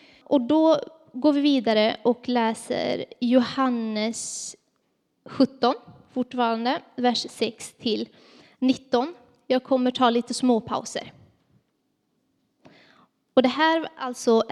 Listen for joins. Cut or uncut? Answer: uncut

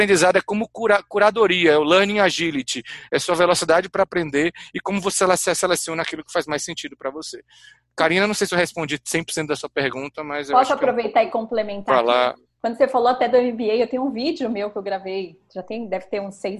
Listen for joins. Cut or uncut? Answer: uncut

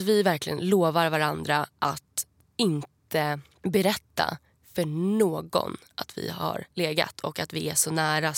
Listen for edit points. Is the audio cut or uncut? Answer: cut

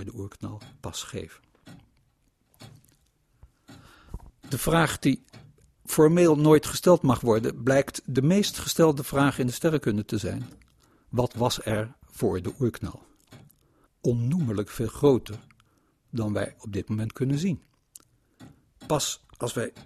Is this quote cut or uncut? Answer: cut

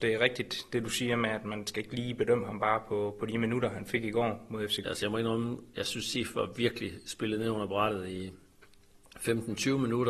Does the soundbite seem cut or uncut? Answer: cut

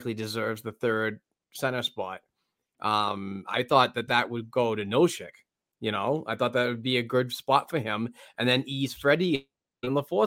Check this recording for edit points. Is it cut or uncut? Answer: uncut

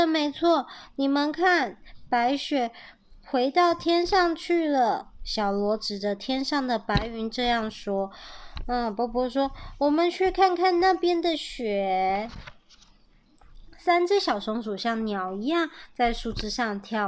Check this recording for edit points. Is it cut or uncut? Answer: uncut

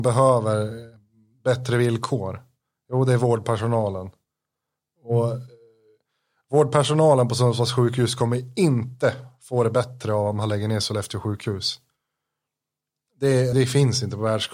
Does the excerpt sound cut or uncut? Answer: cut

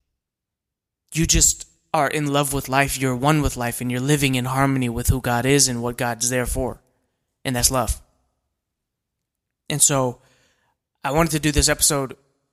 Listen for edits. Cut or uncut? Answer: uncut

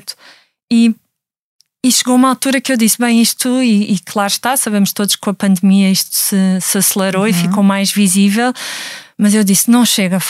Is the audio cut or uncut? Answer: uncut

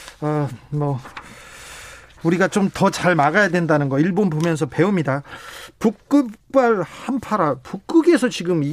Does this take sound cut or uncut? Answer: cut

